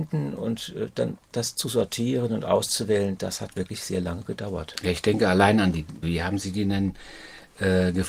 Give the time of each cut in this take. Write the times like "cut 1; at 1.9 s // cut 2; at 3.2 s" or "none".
cut 1; at 6.0 s